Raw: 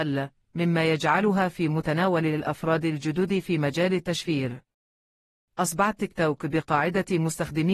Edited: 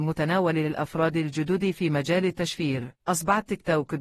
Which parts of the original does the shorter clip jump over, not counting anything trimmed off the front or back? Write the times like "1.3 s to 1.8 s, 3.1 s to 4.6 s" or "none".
4.7 s to 5.5 s